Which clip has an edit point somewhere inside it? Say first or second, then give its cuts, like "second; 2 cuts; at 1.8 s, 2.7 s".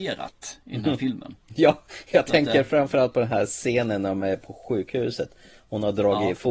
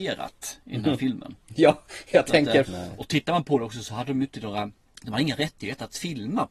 second; 1 cut; at 2.6 s